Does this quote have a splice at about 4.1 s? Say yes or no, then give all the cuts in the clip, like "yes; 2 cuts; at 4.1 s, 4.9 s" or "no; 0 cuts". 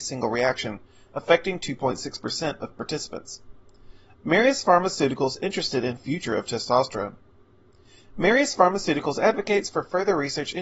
yes; 1 cut; at 4.1 s